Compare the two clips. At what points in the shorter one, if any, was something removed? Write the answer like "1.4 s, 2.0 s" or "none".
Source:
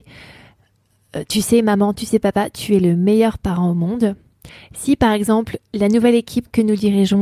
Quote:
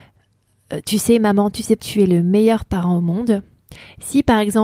1.8 s